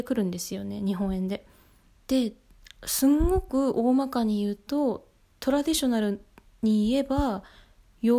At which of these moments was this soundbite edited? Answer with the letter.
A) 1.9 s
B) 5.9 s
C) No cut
A